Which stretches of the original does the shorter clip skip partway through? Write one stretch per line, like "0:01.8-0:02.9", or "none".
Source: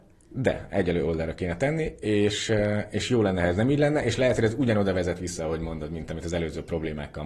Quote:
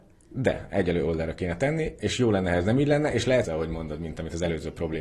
0:02.0-0:02.9
0:04.4-0:05.4